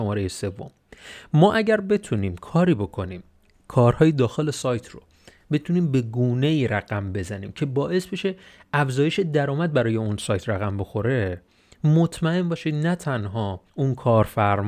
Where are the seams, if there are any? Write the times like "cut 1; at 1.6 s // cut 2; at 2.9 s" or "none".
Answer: cut 1; at 13.7 s